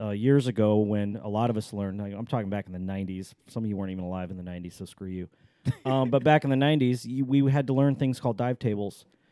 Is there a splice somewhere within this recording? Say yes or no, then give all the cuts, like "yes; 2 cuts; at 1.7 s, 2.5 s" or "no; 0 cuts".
no; 0 cuts